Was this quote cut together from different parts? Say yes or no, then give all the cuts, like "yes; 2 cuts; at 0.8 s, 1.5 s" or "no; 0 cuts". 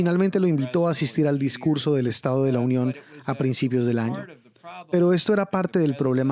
no; 0 cuts